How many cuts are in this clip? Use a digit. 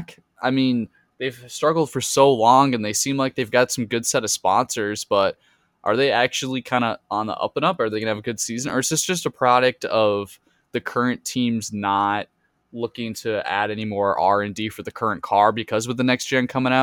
0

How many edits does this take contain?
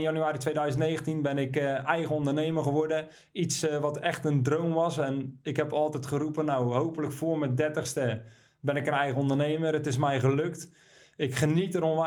0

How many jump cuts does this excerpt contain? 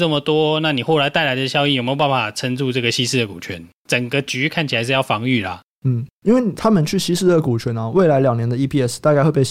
0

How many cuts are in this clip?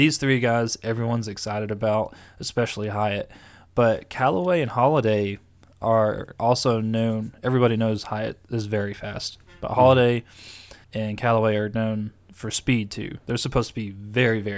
1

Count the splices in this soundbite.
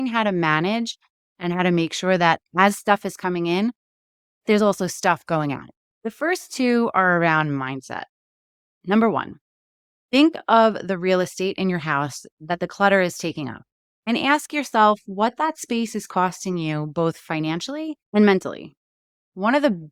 2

